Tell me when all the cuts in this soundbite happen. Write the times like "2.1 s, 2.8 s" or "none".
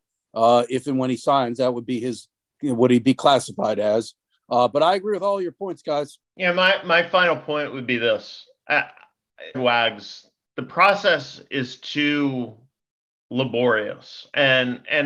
9.5 s